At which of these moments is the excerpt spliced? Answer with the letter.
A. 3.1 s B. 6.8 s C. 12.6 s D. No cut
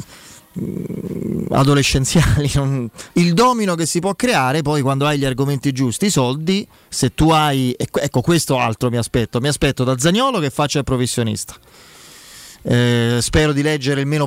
A